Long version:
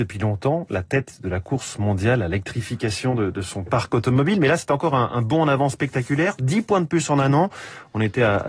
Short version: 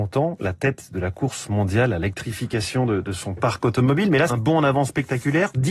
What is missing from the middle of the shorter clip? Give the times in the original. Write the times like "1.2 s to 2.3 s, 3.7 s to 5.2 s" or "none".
4.6 s to 5.1 s